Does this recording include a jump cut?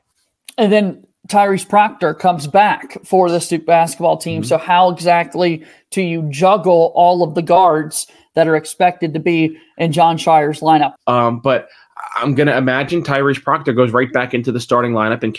yes; 1 cut; at 11.0 s

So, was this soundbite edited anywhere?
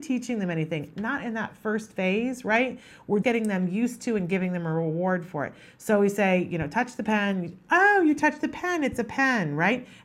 yes; 1 cut; at 3.2 s

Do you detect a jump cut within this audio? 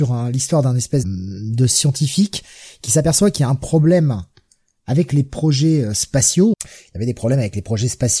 yes; 2 cuts; at 1.0 s, 6.5 s

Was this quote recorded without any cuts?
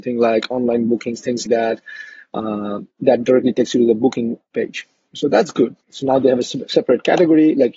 no; 2 cuts; at 1.5 s, 5.8 s

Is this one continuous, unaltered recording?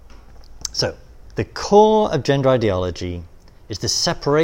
no; 1 cut; at 1.3 s

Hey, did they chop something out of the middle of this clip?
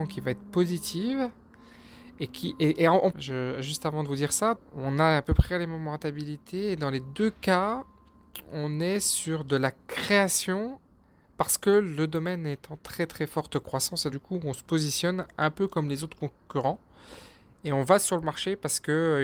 yes; 3 cuts; at 3.1 s, 4.6 s, 14.1 s

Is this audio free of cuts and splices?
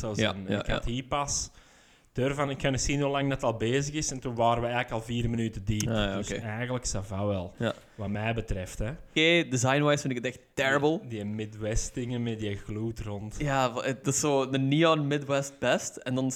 no; 1 cut; at 9.2 s

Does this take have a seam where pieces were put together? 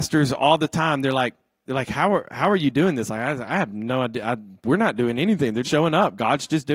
yes; 1 cut; at 5.6 s

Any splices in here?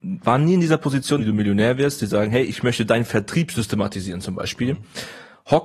yes; 1 cut; at 1.2 s

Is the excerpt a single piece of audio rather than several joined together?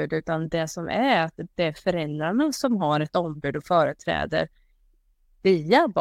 yes; 0 cuts

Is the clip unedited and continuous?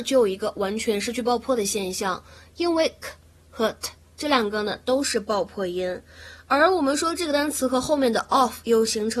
yes; 0 cuts

